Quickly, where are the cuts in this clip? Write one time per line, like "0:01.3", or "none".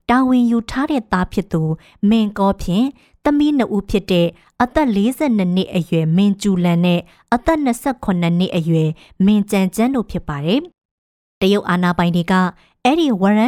0:10.7